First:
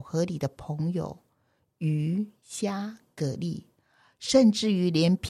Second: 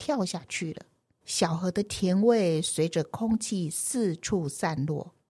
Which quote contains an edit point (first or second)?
second